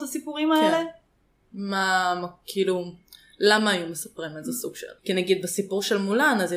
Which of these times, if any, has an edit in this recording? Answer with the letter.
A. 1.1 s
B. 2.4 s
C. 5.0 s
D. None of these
C